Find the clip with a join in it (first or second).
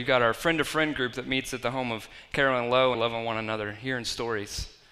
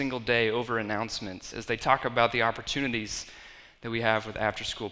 first